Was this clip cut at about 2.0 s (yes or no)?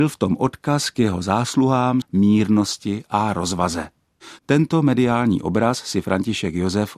yes